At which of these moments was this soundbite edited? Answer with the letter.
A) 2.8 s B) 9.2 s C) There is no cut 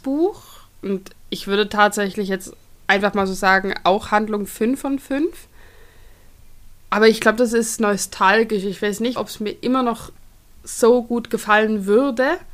B